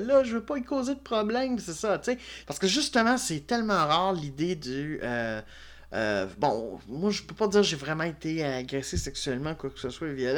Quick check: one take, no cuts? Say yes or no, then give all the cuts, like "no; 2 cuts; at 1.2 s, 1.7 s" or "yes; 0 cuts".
no; 1 cut; at 2.4 s